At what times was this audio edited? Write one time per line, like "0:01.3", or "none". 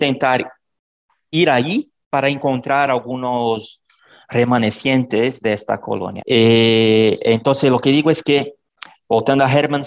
0:06.2